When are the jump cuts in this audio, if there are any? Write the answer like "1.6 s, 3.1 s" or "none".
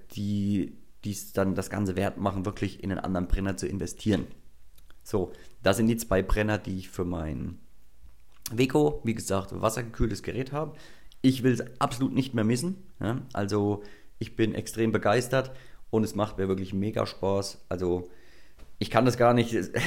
none